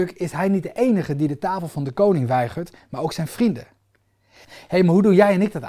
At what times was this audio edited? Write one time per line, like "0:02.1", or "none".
0:04.4